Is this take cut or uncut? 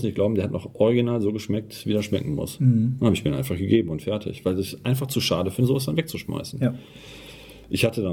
uncut